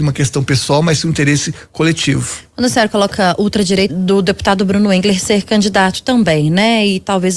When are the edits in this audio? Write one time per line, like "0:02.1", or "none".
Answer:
0:03.9